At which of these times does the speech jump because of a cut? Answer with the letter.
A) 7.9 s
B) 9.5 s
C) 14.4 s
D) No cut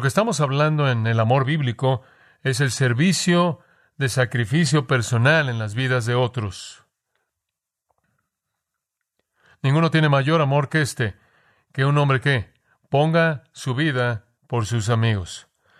C